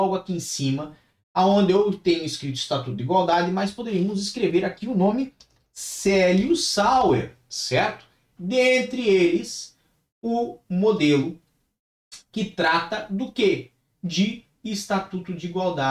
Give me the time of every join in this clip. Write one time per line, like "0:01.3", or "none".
0:08.4